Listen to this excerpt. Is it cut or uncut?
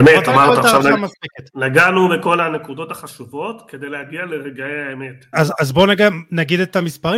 cut